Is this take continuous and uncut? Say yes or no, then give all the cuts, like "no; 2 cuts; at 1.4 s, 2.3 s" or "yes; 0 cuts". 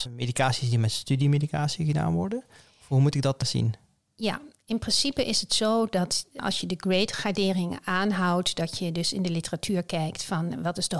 yes; 0 cuts